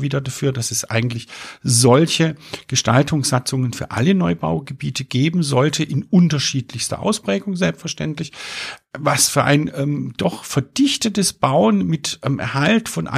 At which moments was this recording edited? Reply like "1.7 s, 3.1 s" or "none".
none